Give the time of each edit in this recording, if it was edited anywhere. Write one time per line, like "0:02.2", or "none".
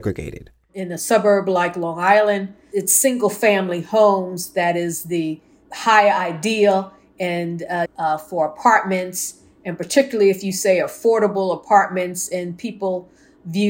0:07.9